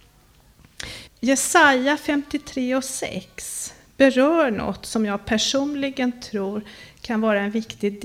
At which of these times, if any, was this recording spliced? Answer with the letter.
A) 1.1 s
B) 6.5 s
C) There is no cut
A